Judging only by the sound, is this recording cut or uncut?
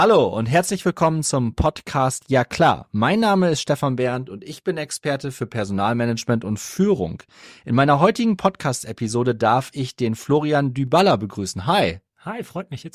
uncut